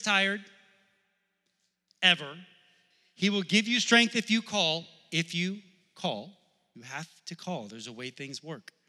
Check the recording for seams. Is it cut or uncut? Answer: uncut